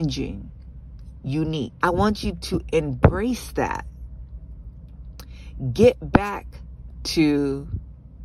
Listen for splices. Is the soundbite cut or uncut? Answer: cut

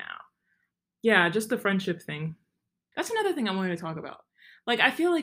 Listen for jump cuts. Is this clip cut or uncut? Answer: cut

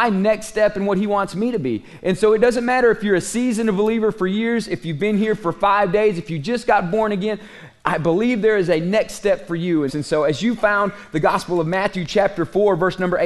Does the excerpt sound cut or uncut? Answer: cut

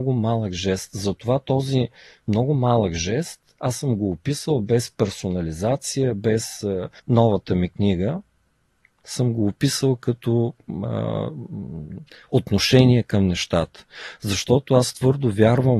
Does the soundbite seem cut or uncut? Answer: cut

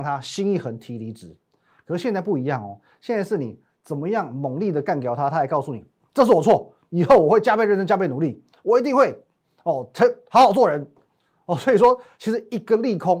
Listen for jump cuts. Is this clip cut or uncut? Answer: uncut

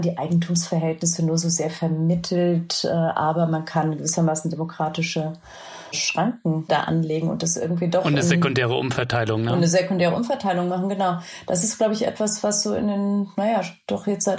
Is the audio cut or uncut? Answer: uncut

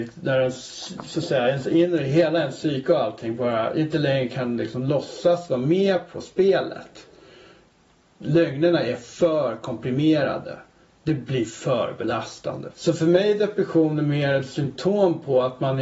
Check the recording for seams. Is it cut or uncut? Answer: cut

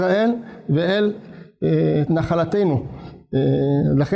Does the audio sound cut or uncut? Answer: cut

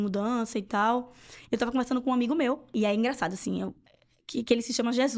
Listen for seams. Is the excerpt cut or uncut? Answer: uncut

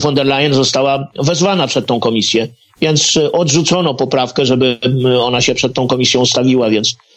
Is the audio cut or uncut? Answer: uncut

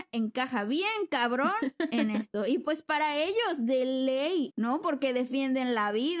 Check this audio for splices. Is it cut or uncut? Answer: cut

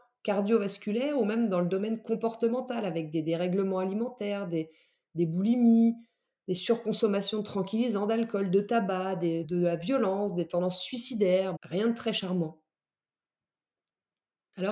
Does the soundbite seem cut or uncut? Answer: cut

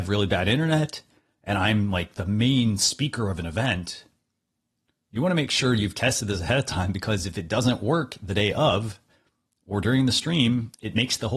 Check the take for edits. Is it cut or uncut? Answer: uncut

